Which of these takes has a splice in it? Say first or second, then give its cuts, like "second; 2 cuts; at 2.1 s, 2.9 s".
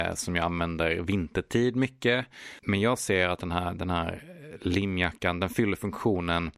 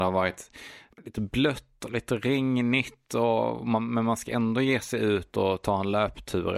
first; 1 cut; at 2.6 s